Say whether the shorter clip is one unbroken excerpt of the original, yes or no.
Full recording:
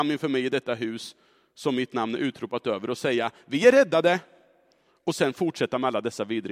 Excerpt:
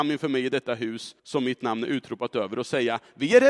no